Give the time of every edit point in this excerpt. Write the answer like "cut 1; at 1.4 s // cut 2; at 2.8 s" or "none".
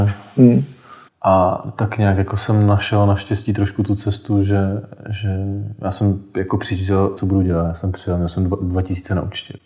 cut 1; at 1.1 s // cut 2; at 7.2 s